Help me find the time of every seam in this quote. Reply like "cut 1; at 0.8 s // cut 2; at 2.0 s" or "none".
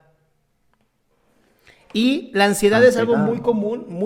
none